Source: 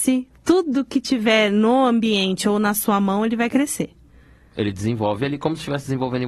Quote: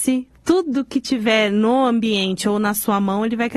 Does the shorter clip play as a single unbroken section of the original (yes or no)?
yes